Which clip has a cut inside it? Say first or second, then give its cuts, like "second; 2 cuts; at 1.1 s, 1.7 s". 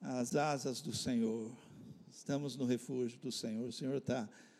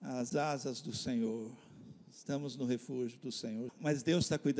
second; 1 cut; at 3.7 s